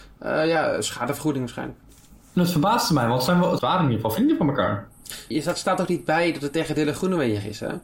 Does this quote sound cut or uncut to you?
cut